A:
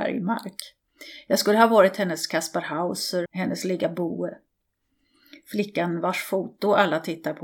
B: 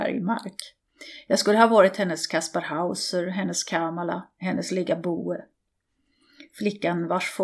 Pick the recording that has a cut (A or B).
A